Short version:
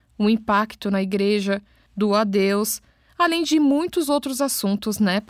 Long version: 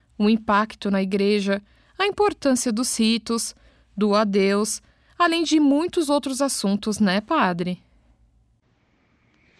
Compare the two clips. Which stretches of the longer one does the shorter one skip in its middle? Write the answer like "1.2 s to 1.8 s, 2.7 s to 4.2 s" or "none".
1.9 s to 3.9 s